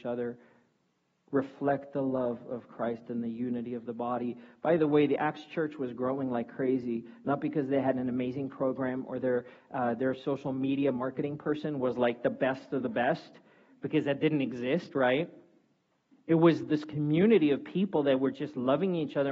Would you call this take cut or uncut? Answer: uncut